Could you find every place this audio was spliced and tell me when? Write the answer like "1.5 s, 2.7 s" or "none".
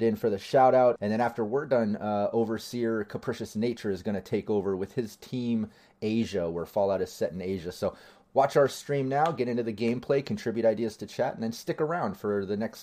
1.0 s